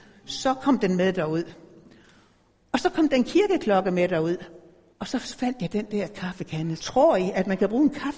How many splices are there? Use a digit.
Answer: 2